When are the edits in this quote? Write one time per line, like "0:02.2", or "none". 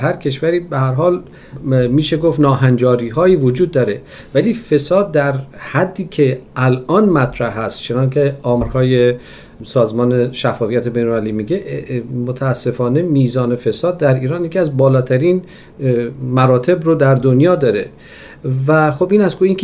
none